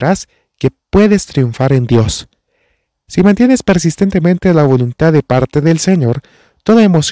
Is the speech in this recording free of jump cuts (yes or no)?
yes